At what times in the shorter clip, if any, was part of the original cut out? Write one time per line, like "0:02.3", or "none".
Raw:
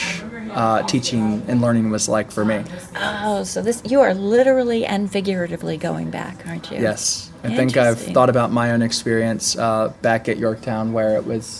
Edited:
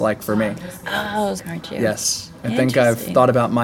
0:01.4